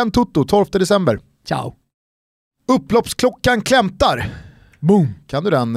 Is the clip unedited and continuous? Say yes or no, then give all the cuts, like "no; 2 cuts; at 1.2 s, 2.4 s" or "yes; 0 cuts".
yes; 0 cuts